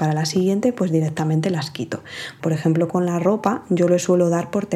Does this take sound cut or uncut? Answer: cut